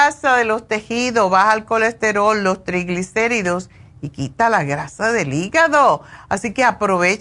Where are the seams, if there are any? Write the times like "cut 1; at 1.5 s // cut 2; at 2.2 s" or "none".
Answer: none